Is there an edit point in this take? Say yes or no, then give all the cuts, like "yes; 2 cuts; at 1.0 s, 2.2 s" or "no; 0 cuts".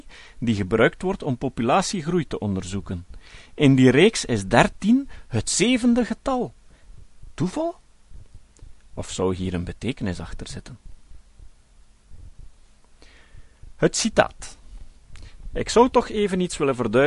no; 0 cuts